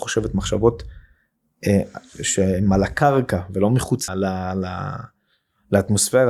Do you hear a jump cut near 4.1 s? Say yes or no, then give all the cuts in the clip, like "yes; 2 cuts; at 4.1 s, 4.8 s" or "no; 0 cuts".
yes; 1 cut; at 4.1 s